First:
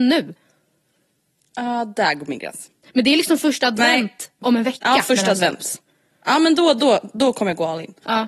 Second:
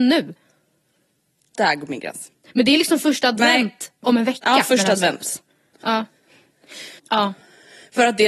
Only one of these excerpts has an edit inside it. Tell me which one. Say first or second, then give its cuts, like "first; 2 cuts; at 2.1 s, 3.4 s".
second; 3 cuts; at 1.6 s, 5.7 s, 7.0 s